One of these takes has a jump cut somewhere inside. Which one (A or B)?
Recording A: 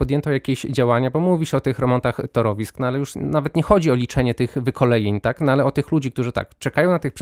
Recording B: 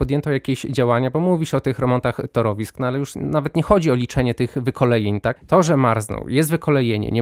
B